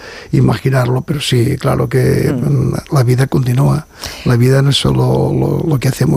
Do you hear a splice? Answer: no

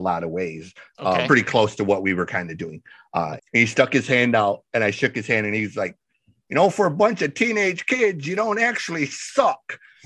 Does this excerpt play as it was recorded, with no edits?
no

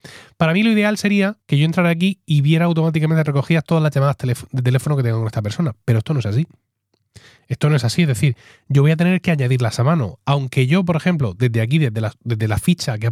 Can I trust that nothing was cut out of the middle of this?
no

